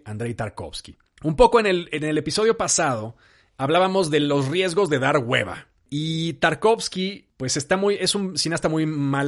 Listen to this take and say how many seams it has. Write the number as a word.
zero